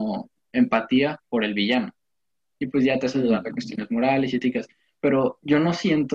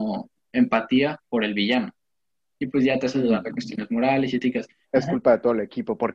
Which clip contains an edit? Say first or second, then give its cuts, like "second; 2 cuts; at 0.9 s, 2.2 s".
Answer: second; 1 cut; at 4.8 s